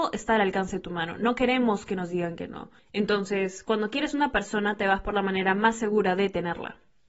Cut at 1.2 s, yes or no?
no